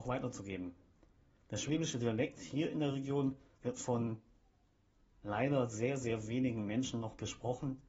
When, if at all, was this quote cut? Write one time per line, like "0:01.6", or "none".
none